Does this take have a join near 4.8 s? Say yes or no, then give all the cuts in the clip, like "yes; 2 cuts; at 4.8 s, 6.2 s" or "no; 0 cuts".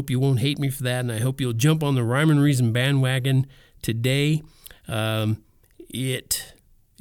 no; 0 cuts